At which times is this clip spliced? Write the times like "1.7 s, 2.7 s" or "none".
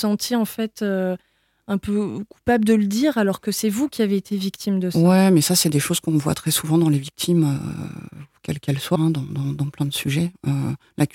8.9 s